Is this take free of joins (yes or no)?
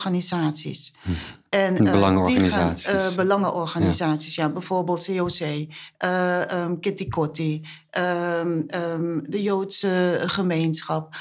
yes